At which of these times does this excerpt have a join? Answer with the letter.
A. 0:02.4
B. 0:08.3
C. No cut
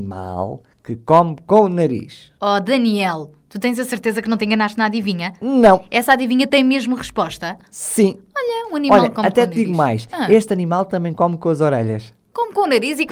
A